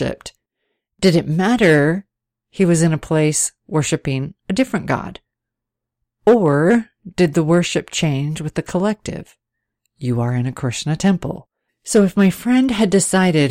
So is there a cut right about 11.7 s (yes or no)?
yes